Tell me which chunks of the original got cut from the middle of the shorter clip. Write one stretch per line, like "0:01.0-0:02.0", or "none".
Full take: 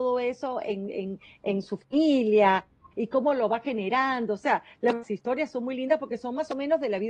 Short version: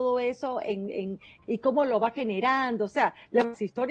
0:01.4-0:02.9